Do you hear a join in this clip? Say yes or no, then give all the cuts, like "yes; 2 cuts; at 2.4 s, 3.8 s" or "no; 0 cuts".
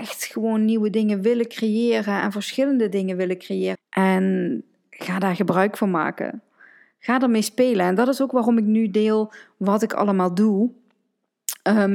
yes; 1 cut; at 3.7 s